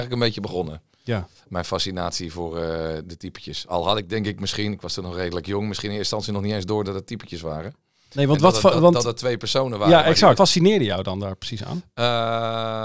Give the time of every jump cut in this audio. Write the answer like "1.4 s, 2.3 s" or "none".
10.4 s